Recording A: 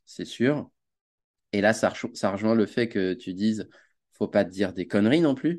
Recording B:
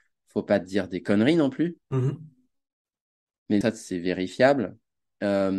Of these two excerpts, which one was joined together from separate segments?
B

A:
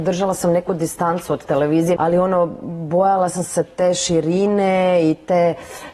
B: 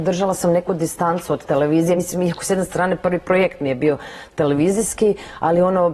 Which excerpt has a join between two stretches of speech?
A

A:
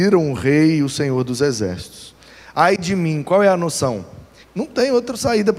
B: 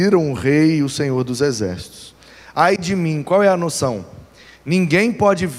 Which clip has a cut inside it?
A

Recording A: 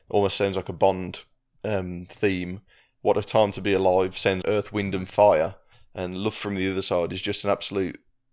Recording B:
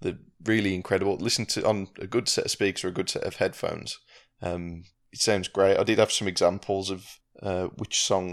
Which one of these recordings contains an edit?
A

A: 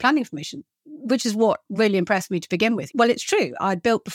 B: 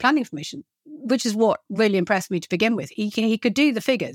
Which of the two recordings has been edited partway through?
A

